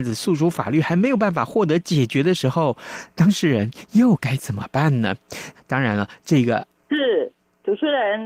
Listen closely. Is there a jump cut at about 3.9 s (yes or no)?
no